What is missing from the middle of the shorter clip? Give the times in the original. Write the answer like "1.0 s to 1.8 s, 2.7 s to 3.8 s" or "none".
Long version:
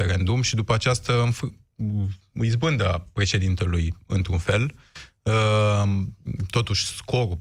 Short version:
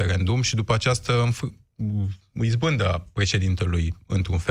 none